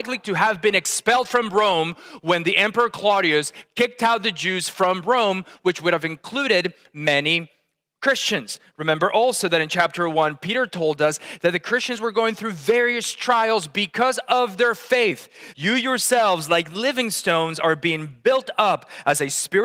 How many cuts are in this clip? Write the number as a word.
one